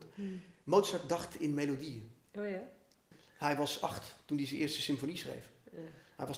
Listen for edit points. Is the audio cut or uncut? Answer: cut